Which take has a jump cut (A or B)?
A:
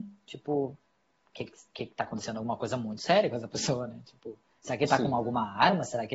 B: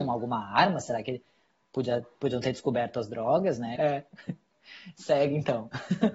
B